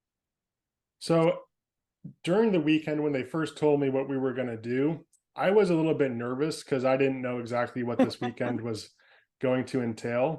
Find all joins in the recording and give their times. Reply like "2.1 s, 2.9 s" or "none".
none